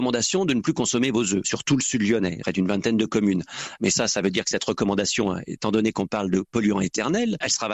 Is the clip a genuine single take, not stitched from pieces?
yes; 0 cuts

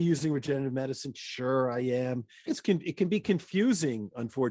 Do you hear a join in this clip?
yes; 1 cut; at 2.5 s

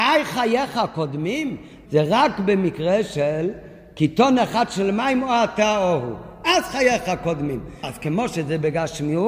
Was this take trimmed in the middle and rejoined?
yes; 2 cuts; at 1.9 s, 7.8 s

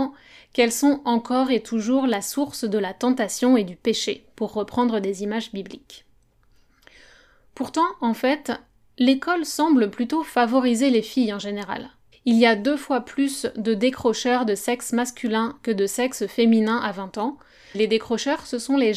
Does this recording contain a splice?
yes; 2 cuts; at 12.1 s, 17.7 s

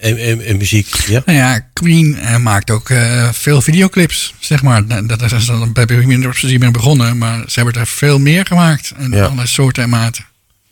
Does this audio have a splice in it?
no; 0 cuts

